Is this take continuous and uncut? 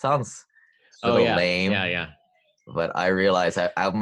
yes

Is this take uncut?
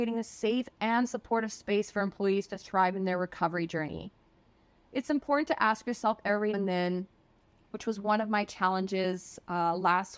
no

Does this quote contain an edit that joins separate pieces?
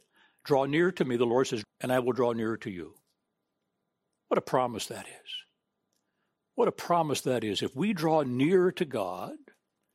yes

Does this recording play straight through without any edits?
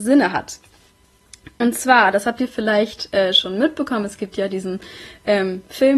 yes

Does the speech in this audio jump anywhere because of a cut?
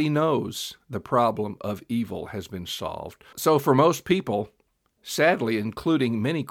yes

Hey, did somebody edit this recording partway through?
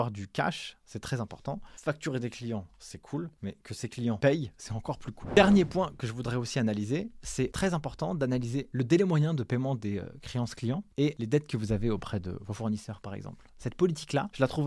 no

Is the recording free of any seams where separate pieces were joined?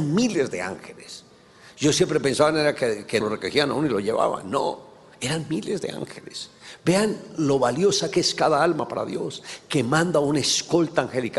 no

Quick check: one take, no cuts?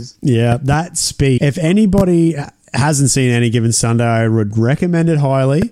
no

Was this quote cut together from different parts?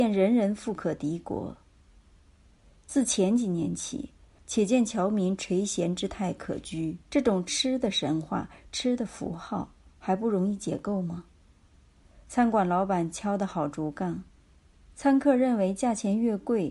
yes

